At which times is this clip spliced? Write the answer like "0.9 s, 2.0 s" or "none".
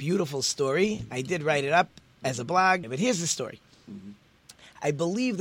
2.8 s

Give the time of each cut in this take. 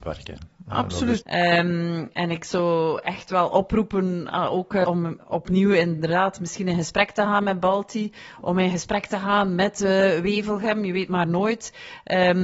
1.2 s, 4.8 s

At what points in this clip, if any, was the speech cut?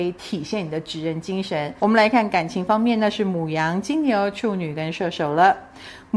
1.8 s

